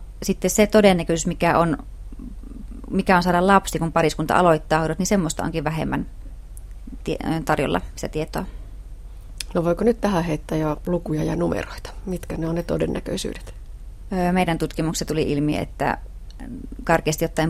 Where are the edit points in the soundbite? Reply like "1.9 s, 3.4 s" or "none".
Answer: none